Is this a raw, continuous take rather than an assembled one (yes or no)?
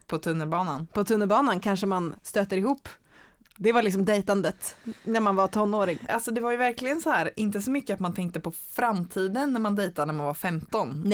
no